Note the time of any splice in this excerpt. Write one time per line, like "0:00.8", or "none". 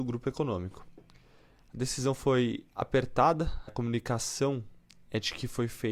0:03.7